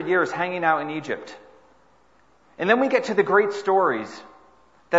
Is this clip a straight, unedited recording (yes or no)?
yes